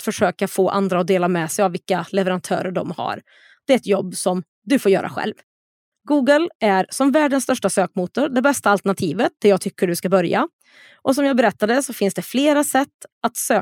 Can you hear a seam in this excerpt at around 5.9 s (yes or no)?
yes